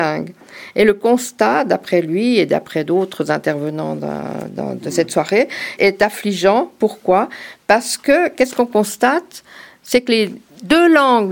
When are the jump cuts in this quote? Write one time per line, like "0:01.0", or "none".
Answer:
0:05.8